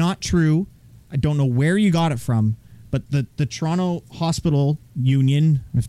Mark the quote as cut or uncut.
uncut